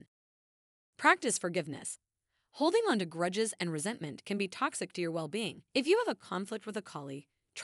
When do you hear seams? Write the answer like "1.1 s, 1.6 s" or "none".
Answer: 5.7 s